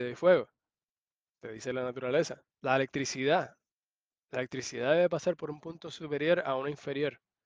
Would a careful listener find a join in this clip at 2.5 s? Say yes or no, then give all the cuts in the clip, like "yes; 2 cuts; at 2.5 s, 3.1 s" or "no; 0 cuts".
yes; 1 cut; at 2.5 s